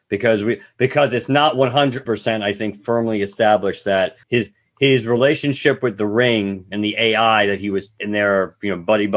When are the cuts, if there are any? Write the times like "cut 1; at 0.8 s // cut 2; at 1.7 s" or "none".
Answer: cut 1; at 2.1 s // cut 2; at 4.2 s